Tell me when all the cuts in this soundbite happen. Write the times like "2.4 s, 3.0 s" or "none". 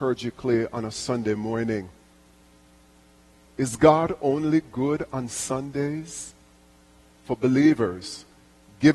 3.5 s, 7.1 s